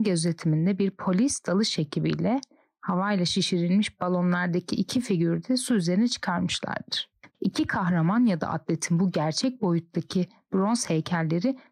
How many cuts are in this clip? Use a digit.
1